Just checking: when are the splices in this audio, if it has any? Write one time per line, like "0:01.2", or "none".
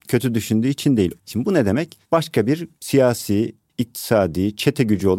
0:01.2